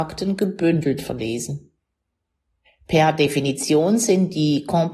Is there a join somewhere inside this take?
no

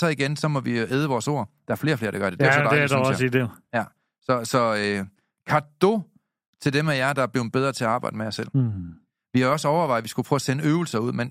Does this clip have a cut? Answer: no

